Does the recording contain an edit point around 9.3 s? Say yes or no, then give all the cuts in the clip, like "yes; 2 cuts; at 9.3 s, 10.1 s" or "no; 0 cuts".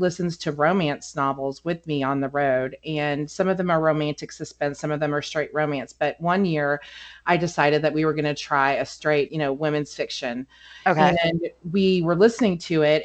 yes; 1 cut; at 9.3 s